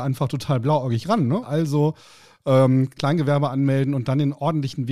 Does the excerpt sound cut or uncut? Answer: cut